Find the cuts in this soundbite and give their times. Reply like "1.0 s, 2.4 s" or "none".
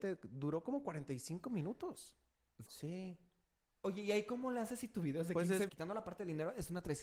2.7 s, 5.7 s